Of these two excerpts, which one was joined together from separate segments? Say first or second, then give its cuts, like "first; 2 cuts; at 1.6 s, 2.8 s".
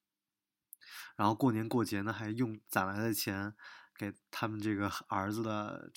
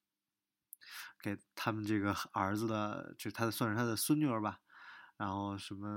second; 1 cut; at 1.1 s